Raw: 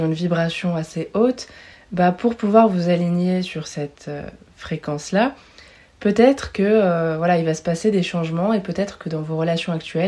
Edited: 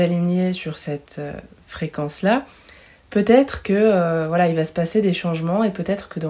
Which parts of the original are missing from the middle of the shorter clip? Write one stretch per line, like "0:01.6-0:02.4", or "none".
none